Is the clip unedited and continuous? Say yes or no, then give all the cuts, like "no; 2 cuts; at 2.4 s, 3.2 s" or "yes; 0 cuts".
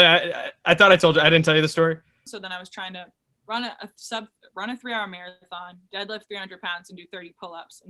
no; 1 cut; at 2.3 s